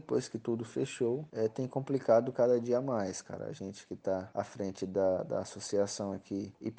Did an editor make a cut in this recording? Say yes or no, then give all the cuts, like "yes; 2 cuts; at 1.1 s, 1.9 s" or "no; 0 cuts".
no; 0 cuts